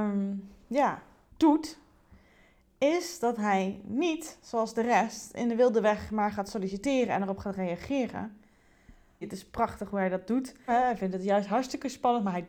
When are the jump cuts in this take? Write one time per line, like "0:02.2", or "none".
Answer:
0:09.2
0:10.7